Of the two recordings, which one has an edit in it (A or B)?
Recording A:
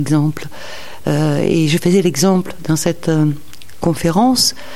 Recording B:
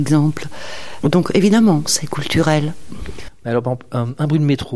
B